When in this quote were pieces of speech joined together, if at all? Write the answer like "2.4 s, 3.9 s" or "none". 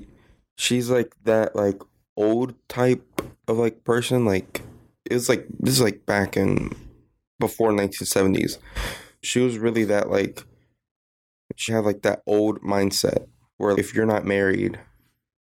9.2 s, 11.7 s, 13.7 s